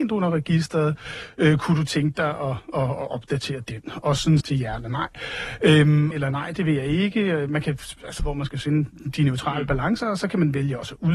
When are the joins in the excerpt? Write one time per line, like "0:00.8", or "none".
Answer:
0:04.4
0:06.1
0:08.2